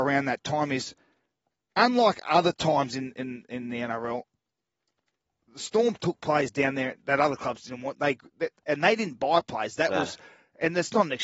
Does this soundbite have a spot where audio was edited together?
no; 0 cuts

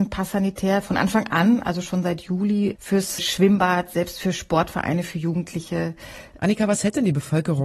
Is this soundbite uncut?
no; 2 cuts; at 3.2 s, 6.4 s

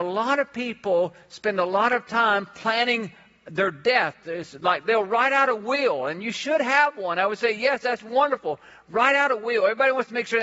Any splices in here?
no; 0 cuts

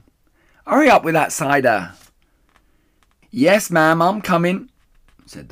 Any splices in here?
no; 0 cuts

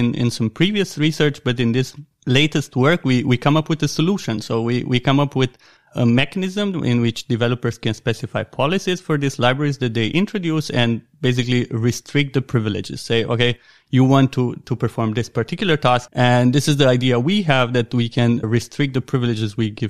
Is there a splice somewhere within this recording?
yes; 2 cuts; at 16.1 s, 18.4 s

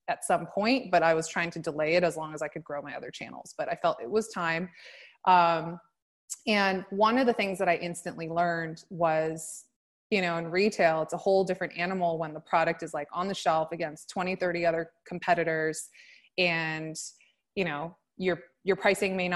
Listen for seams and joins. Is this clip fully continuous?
yes; 0 cuts

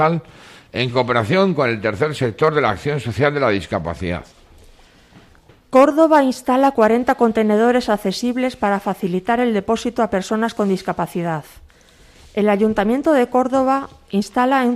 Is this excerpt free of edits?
yes; 0 cuts

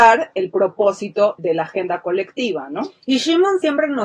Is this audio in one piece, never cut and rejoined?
no; 1 cut; at 1.4 s

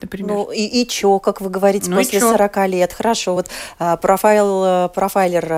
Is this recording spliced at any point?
no; 0 cuts

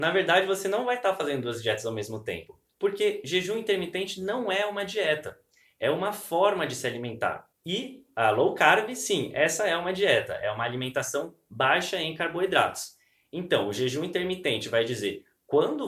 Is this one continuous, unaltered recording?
yes; 0 cuts

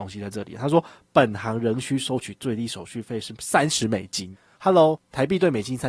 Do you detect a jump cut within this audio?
no; 0 cuts

